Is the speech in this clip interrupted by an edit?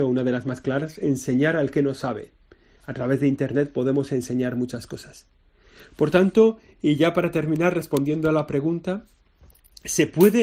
no; 0 cuts

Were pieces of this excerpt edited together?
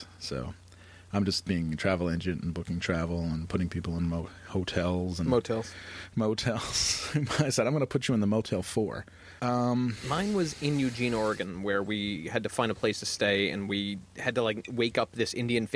yes; 1 cut; at 9.4 s

